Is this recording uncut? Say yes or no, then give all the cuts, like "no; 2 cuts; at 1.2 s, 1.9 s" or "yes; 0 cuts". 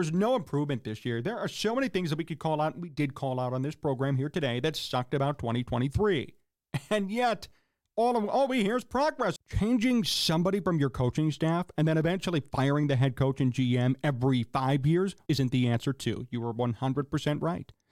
no; 2 cuts; at 9.4 s, 15.3 s